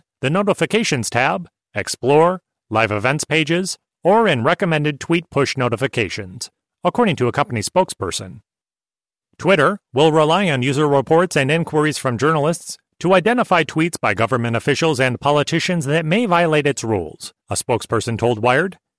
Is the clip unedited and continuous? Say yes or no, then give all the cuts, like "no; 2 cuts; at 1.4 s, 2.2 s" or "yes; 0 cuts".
no; 1 cut; at 17.4 s